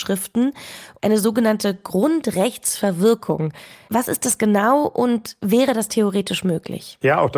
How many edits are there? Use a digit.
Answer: 1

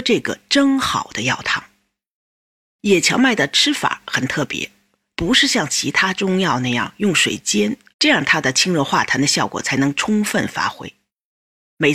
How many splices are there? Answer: 2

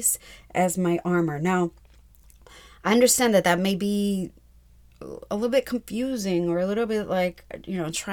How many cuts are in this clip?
0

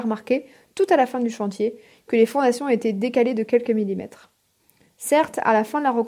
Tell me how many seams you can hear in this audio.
0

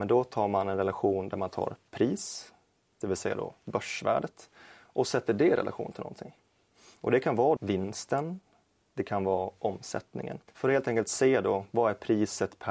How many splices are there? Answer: 2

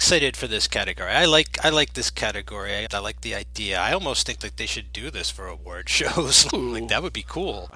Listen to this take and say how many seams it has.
2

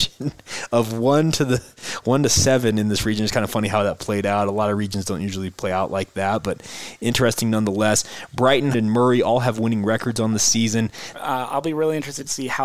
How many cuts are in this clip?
2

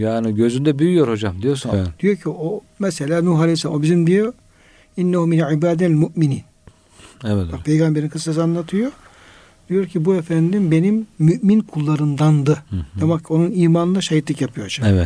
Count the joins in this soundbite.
1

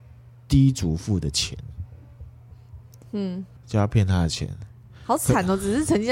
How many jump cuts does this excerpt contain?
1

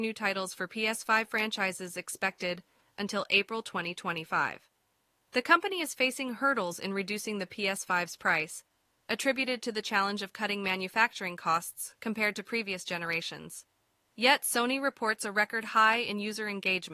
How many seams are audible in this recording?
0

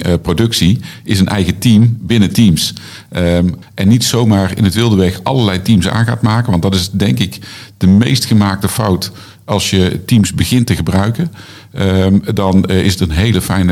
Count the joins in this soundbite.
1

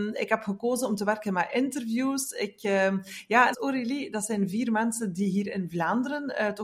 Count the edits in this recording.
1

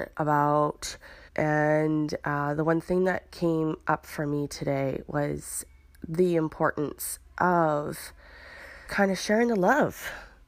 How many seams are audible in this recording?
2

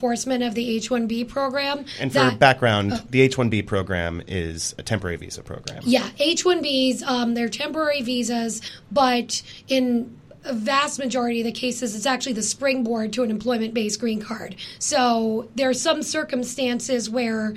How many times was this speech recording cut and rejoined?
0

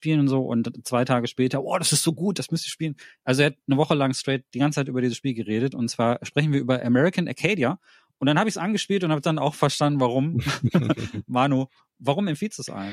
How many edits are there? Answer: 0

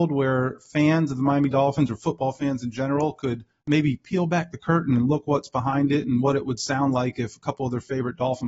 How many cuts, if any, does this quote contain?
0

